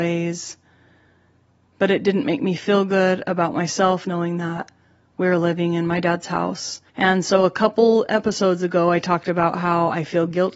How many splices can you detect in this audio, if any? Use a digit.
2